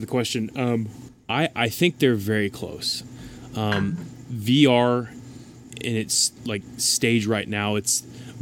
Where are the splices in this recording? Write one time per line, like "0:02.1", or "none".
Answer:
0:03.1